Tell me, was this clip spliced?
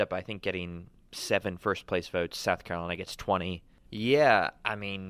yes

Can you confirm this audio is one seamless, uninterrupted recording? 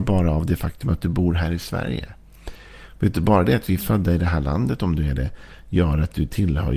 yes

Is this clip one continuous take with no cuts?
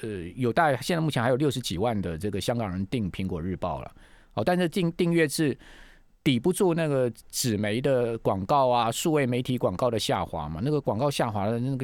yes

